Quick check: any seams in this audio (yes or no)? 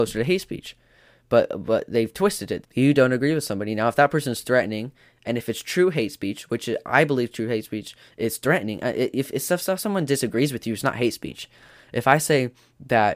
yes